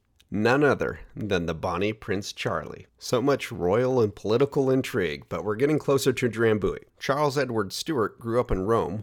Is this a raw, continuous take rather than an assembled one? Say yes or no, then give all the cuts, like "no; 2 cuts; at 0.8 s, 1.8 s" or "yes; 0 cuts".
no; 1 cut; at 6.9 s